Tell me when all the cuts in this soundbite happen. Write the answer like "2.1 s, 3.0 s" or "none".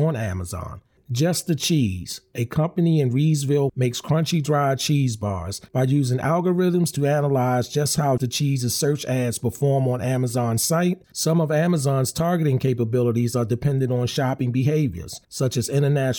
3.7 s, 8.2 s, 11.0 s